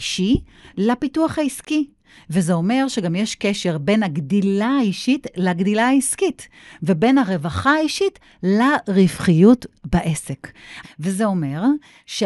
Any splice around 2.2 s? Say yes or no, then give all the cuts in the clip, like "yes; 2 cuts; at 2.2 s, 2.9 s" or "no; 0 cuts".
no; 2 cuts; at 6.8 s, 10.8 s